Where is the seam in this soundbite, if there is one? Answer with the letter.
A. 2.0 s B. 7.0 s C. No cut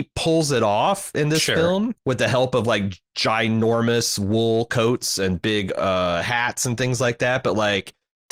A